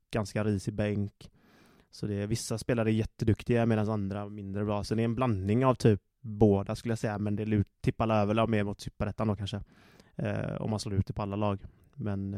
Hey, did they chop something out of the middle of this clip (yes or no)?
no